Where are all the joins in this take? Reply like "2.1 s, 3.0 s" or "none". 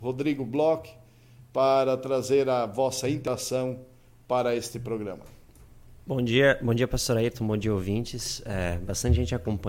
none